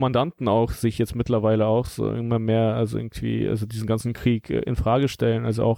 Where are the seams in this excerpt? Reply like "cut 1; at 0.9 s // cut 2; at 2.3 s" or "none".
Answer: none